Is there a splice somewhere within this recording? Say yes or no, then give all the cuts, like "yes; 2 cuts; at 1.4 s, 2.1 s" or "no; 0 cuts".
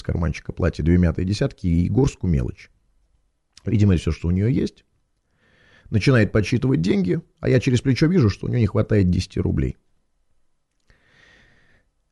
no; 0 cuts